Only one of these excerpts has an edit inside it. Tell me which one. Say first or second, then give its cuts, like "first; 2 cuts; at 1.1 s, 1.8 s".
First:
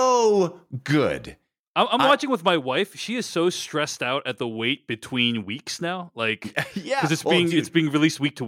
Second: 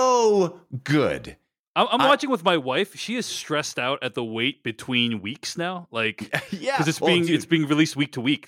second; 1 cut; at 3.3 s